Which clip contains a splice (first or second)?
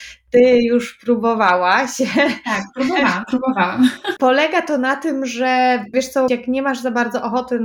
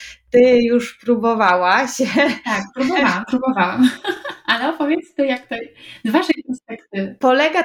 first